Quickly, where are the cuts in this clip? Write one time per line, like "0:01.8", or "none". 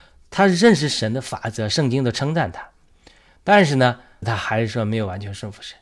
0:04.2